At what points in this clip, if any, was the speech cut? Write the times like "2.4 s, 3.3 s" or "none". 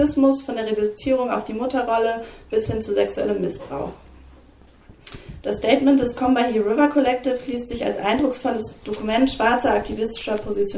5.4 s